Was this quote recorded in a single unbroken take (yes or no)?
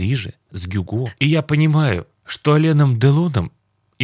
no